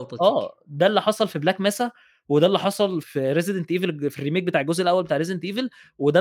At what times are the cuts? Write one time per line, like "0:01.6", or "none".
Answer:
0:03.0